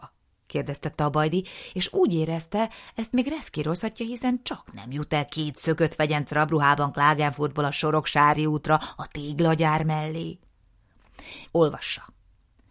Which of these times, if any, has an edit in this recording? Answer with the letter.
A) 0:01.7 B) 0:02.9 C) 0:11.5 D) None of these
C